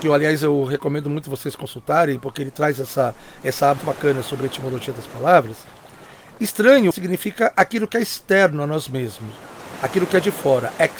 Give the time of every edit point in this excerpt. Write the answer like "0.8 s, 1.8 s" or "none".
3.8 s, 6.9 s